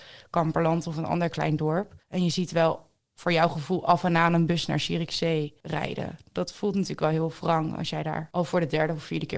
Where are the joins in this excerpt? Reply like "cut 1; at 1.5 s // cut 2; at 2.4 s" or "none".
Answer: cut 1; at 2.0 s